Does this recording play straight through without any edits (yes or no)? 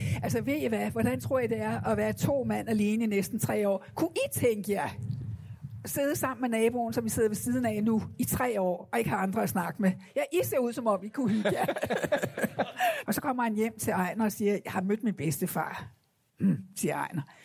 no